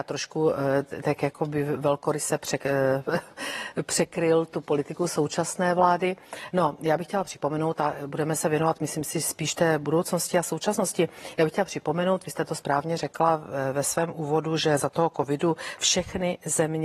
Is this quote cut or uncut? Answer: uncut